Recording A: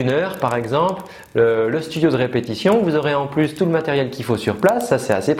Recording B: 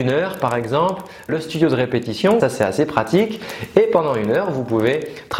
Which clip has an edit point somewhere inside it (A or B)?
B